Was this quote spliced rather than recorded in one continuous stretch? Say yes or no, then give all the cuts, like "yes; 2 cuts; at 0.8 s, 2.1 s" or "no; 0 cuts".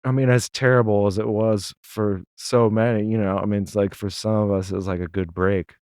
yes; 1 cut; at 2.3 s